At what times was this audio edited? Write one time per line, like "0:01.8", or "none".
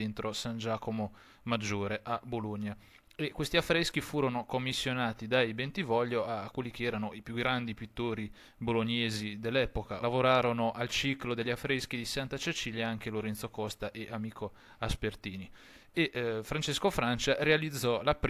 0:10.0